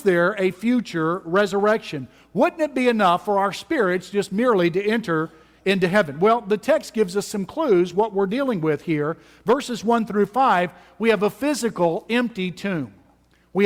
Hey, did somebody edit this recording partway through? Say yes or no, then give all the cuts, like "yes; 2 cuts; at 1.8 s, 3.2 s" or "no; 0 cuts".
no; 0 cuts